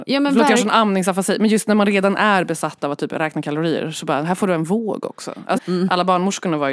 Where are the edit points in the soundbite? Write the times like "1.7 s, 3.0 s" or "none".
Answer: 5.6 s